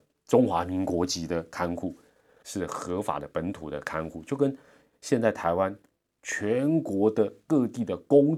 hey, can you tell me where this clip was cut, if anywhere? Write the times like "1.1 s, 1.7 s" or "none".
2.4 s